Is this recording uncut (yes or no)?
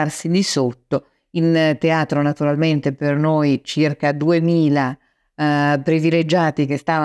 yes